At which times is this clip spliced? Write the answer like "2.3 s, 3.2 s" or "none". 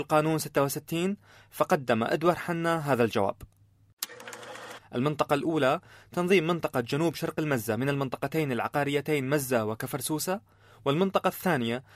4.8 s